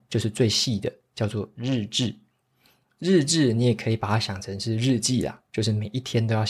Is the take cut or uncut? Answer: uncut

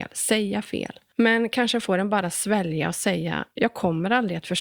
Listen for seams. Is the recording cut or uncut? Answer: cut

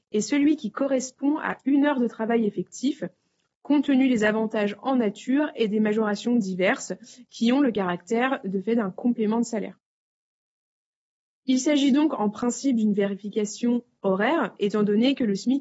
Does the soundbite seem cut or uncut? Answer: uncut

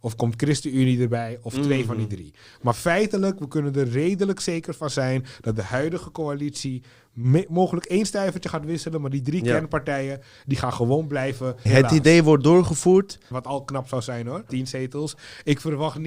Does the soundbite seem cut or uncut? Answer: cut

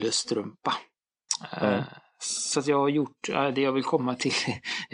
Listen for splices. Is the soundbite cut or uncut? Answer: uncut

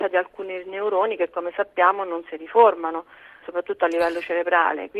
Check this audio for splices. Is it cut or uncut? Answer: cut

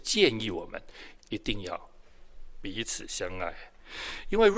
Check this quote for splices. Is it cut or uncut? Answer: cut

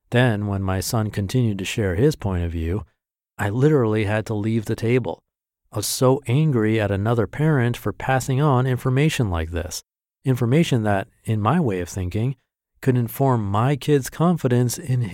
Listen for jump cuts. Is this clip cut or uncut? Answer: cut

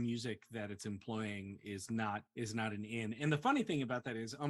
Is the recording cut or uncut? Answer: cut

